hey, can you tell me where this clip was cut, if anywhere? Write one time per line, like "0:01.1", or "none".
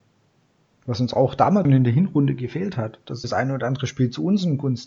0:01.6
0:03.2